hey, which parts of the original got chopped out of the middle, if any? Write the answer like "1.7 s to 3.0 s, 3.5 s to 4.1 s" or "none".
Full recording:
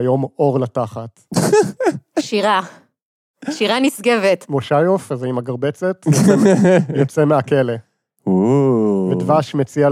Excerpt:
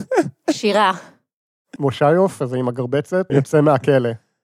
3.4 s to 4.5 s, 6.0 s to 6.9 s